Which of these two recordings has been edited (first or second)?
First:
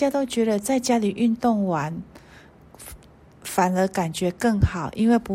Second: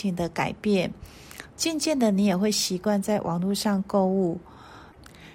second